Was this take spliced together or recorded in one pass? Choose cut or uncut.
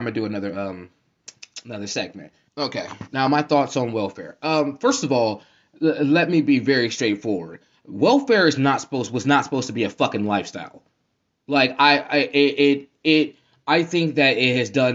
cut